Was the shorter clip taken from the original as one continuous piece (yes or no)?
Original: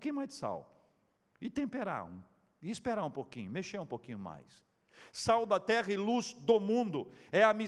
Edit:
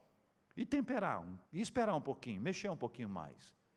no